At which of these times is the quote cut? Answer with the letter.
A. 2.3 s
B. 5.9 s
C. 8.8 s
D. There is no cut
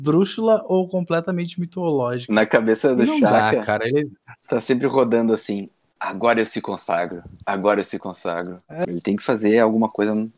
C